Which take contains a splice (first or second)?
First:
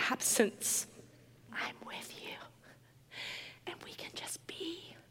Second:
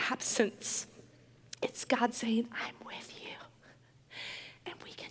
first